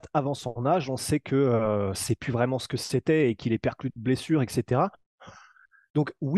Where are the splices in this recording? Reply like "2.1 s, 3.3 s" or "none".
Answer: 1.9 s